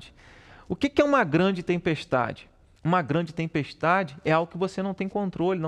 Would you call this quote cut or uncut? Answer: cut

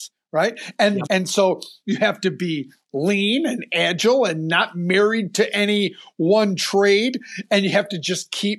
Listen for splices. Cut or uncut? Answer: cut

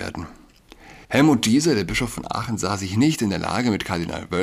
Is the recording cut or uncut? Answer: cut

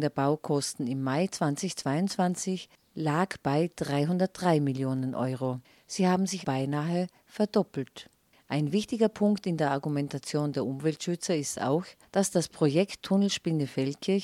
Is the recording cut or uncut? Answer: cut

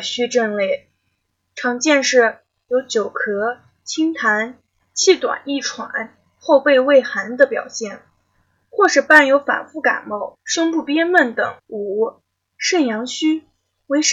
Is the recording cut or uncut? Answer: cut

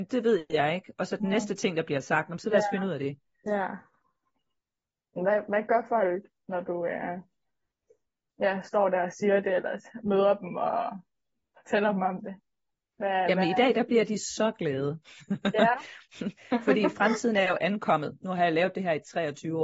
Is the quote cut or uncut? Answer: uncut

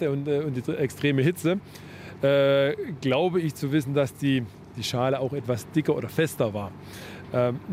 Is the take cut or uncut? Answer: uncut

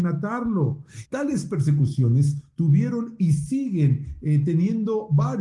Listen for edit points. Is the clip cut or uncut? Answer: cut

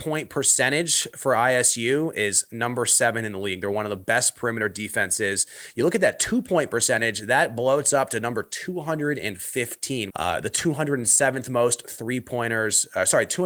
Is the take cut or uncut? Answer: cut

